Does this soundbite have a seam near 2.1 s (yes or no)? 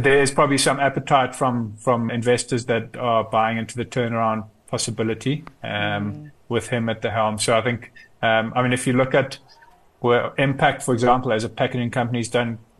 yes